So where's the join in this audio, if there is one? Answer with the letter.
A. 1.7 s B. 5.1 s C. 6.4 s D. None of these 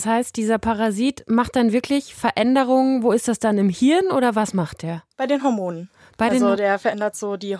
B